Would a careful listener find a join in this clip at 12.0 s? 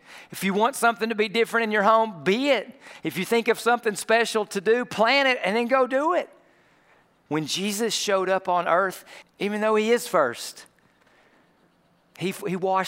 no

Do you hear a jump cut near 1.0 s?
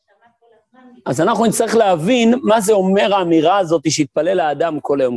yes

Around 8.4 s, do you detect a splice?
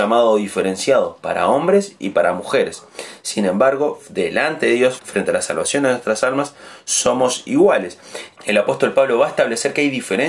yes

